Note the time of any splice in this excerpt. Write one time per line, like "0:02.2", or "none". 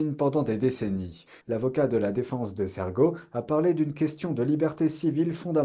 0:01.4